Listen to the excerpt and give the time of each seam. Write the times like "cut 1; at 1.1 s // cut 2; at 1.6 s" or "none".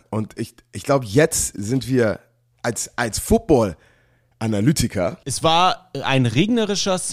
cut 1; at 5.2 s